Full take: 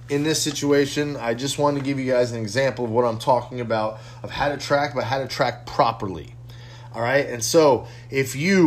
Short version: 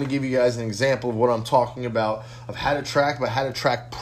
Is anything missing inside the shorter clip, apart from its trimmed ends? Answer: no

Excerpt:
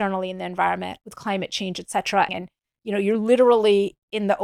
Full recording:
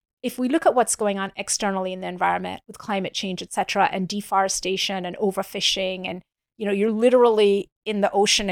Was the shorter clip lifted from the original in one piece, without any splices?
no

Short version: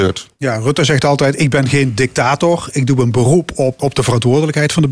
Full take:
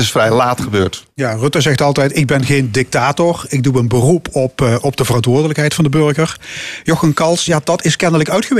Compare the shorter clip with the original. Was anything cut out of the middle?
yes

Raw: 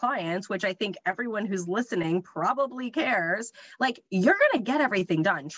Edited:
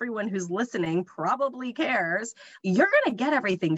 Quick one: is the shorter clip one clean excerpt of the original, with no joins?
no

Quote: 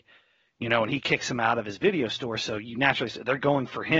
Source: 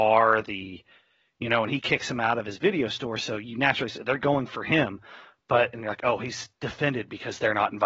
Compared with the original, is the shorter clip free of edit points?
yes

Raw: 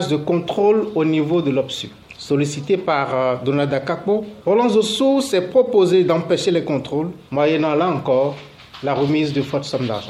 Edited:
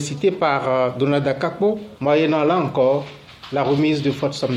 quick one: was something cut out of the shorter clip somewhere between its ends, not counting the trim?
yes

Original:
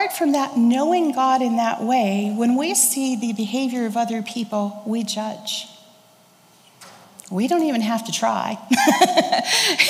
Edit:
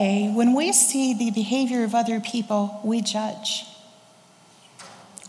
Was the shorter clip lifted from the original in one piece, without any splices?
yes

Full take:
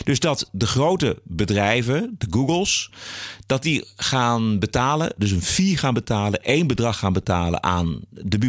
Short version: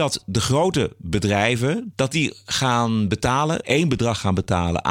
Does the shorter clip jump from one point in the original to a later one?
yes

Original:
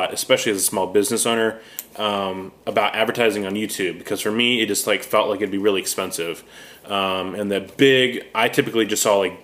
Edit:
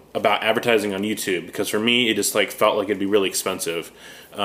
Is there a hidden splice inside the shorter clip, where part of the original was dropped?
no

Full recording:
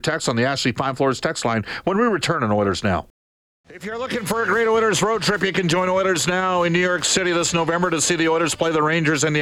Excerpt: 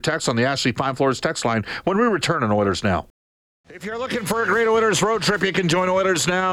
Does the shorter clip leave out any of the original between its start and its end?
no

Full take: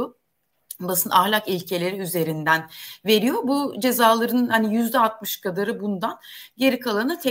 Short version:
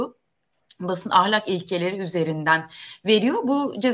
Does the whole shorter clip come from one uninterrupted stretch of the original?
yes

